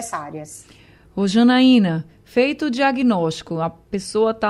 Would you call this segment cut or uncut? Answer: uncut